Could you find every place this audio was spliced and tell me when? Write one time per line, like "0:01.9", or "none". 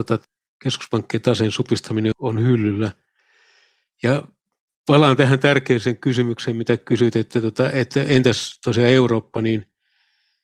0:02.1